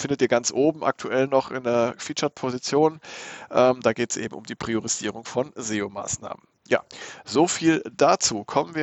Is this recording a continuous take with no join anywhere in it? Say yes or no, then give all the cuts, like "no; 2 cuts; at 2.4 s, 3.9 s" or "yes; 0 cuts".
yes; 0 cuts